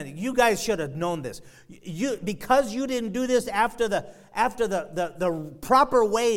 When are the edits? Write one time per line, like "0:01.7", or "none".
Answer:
none